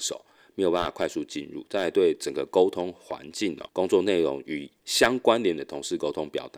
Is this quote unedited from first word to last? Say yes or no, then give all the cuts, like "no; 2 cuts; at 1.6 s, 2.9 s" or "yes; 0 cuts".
yes; 0 cuts